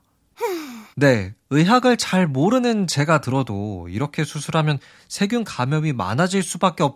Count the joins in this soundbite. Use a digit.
1